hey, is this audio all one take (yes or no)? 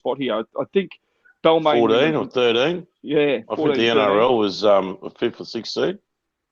yes